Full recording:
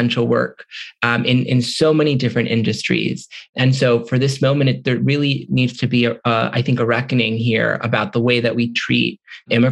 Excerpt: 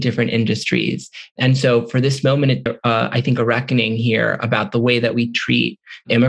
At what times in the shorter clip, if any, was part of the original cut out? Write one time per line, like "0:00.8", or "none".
0:02.7